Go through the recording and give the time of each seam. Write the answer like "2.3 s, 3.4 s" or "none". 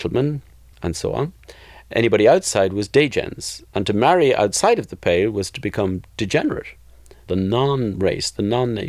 7.3 s